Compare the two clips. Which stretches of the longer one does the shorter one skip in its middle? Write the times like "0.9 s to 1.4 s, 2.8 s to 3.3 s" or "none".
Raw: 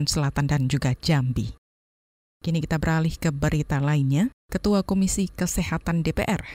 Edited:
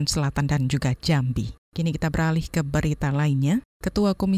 1.6 s to 2.3 s